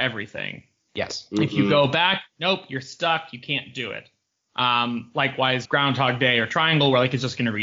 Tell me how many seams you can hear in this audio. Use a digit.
1